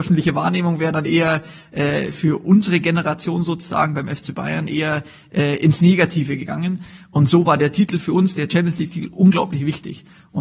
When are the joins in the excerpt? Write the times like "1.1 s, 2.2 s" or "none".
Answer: none